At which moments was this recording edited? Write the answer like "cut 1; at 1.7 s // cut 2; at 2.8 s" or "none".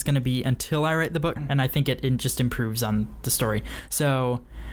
cut 1; at 1.4 s